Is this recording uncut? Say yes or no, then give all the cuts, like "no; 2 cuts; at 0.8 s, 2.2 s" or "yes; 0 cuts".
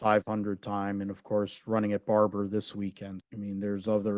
no; 1 cut; at 3.2 s